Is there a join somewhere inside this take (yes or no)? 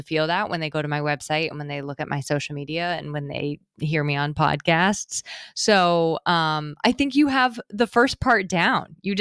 no